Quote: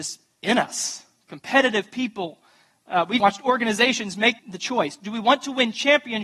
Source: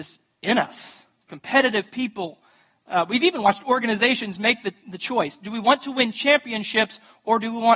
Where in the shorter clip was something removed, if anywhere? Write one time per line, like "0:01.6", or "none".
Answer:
0:03.2
0:04.4